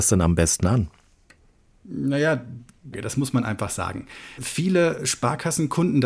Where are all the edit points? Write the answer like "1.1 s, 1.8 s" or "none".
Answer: 2.9 s